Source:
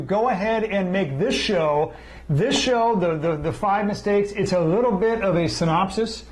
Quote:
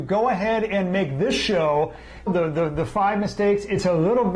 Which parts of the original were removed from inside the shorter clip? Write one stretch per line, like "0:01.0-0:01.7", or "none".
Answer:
0:02.3-0:02.9